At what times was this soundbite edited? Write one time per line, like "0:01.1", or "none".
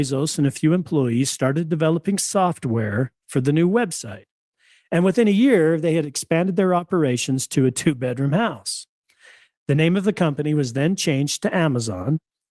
none